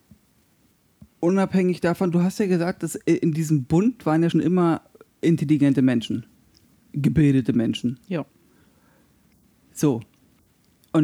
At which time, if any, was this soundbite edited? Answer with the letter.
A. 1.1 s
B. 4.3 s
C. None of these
B